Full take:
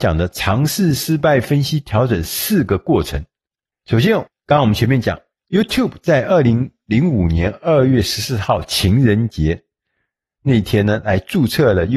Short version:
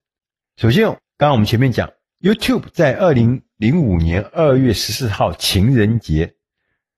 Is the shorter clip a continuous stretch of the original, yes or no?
yes